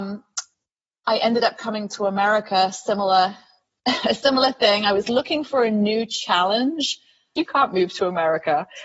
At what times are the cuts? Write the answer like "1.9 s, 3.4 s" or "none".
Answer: 7.4 s